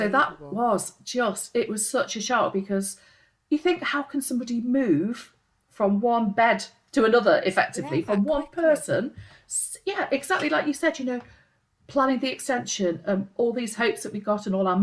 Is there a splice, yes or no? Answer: no